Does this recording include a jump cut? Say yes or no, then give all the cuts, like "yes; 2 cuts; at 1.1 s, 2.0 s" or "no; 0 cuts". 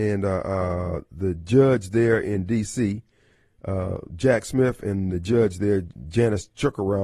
no; 0 cuts